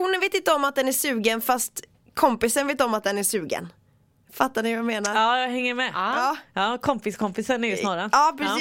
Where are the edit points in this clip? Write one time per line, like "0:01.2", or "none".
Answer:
none